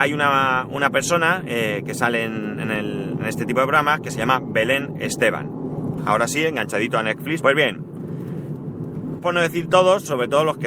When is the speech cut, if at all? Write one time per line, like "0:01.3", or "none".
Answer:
0:06.0
0:07.4
0:09.2

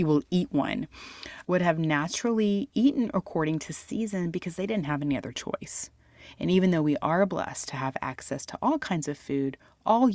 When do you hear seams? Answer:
0:01.4

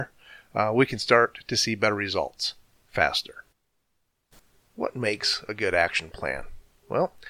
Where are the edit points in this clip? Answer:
none

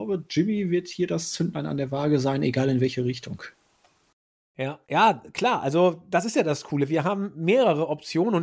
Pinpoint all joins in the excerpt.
0:04.8

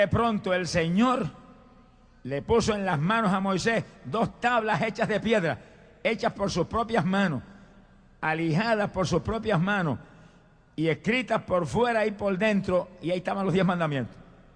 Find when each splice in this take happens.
none

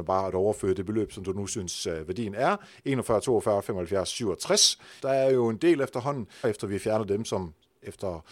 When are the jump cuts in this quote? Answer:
0:05.0
0:06.4

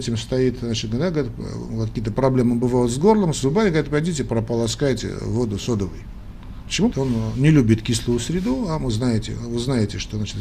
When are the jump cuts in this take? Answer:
0:06.9

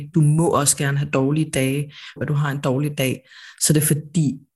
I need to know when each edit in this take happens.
0:02.2

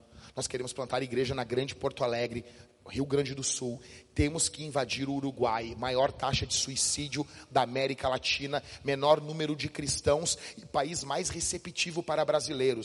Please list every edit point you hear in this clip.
none

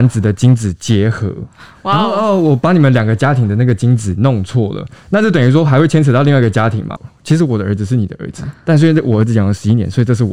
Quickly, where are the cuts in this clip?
0:07.0

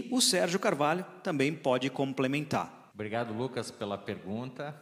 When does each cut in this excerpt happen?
0:02.9

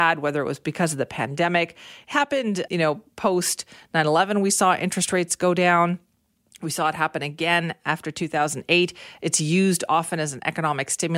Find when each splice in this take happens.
0:02.7

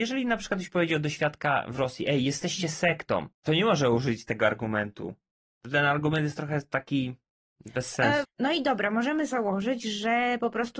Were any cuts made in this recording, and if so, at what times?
0:03.3
0:08.2

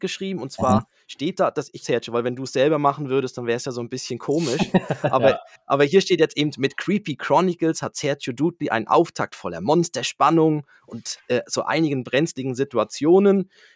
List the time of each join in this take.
0:01.8

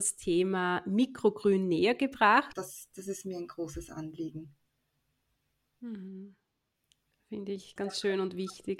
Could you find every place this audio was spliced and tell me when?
0:02.5
0:07.8

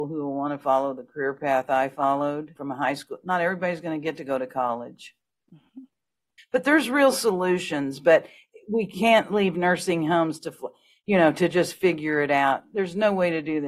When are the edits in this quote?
0:02.6
0:06.4

